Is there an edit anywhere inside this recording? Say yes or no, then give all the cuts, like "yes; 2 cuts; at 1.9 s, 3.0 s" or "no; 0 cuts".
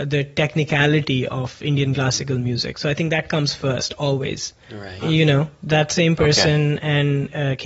yes; 1 cut; at 5.0 s